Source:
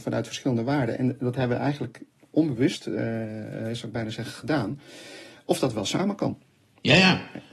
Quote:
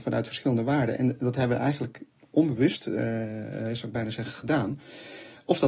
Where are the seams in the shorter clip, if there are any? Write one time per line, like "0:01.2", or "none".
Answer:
none